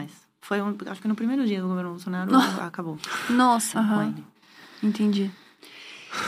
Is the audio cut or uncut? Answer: cut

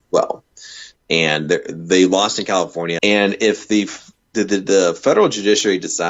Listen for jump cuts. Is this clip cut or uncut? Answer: cut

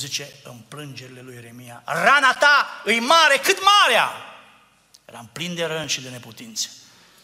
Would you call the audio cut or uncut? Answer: uncut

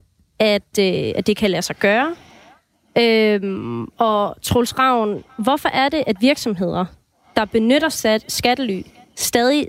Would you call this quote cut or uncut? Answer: uncut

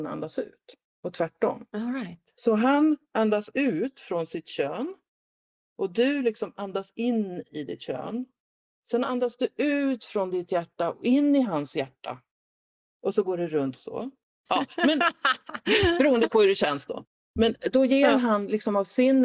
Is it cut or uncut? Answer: cut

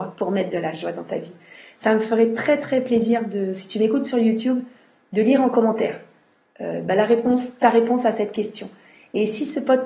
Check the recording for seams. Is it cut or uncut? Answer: uncut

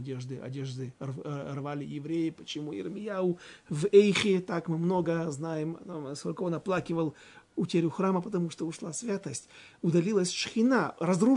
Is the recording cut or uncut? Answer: uncut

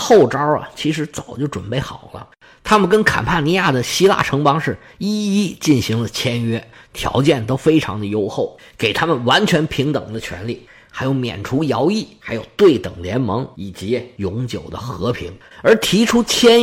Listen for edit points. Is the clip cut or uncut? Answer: cut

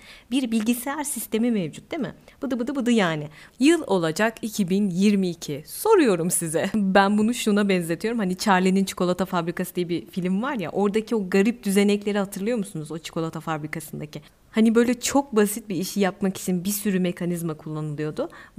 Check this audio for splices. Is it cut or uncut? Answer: cut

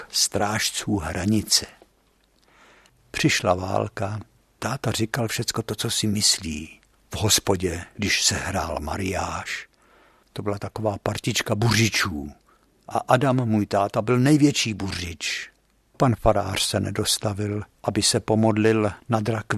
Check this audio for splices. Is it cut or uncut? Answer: cut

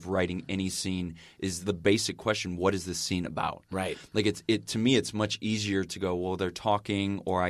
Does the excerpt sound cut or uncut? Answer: uncut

